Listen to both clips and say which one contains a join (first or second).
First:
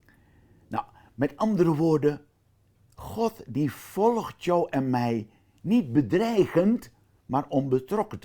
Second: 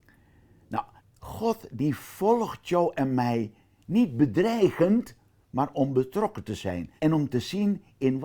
second